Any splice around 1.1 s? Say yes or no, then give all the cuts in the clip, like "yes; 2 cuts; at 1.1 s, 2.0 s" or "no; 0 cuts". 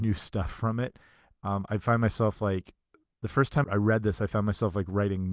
no; 1 cut; at 3.6 s